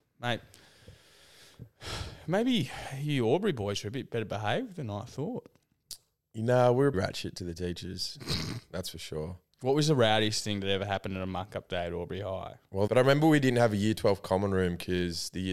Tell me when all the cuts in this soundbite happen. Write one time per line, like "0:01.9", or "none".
0:06.9
0:12.9